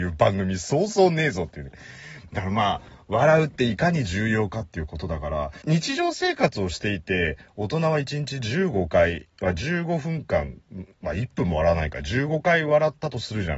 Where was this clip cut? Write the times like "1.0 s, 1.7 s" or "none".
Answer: 5.6 s